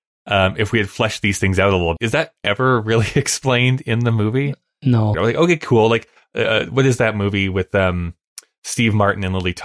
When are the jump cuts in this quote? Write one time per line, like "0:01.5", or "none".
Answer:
0:02.0
0:05.1